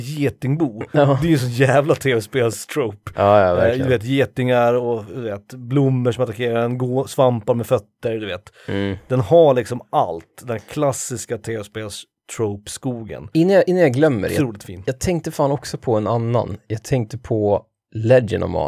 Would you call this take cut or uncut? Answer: uncut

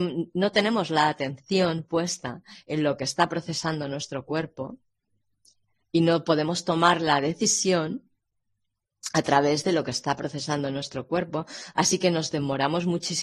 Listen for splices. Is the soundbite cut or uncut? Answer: uncut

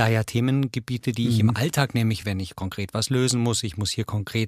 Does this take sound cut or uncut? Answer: uncut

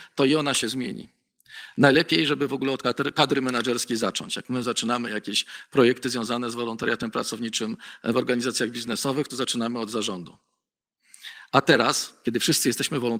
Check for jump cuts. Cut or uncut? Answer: uncut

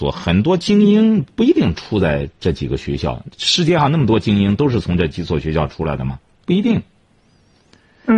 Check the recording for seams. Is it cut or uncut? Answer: uncut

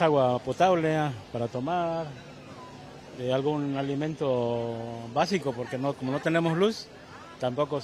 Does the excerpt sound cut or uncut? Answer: uncut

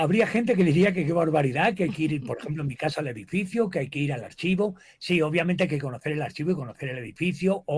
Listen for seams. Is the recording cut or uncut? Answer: uncut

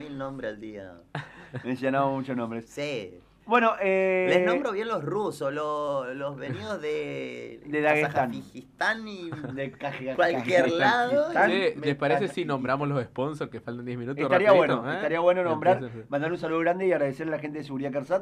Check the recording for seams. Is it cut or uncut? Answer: uncut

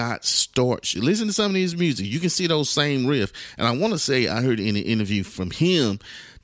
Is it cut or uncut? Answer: cut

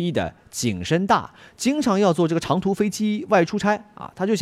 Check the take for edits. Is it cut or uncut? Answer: cut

